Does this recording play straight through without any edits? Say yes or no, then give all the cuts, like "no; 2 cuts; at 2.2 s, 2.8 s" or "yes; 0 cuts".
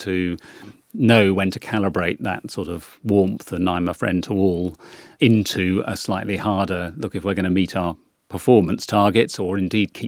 yes; 0 cuts